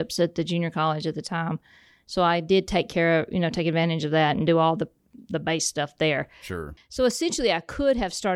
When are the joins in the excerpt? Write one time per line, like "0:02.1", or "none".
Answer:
0:06.8